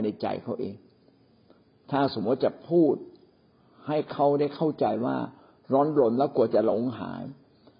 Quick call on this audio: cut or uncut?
uncut